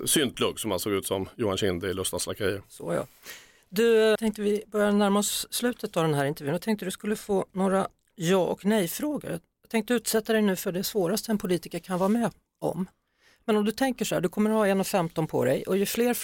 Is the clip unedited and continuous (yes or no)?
no